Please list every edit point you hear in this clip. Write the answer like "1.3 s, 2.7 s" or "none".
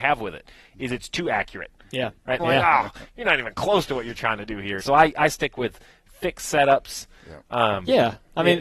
2.4 s, 4.8 s